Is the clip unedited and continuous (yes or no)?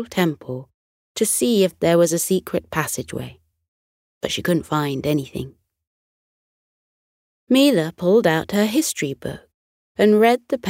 yes